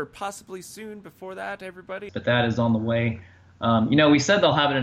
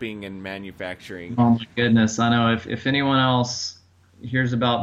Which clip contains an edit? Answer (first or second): first